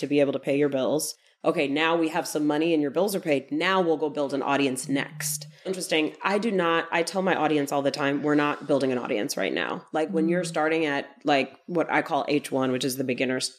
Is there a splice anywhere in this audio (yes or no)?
yes